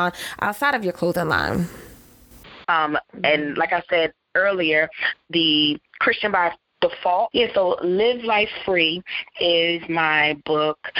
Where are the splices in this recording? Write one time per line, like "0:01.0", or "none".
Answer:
0:02.6
0:07.3